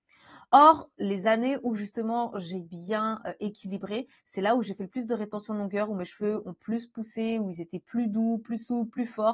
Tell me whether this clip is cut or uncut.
uncut